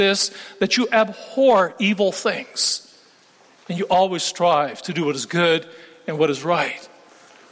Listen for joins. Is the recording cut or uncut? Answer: uncut